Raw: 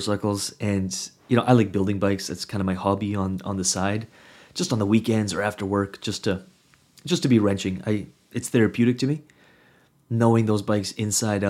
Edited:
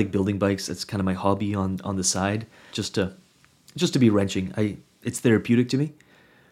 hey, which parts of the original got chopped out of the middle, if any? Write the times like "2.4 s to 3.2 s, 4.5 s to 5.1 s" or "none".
4.3 s to 6.0 s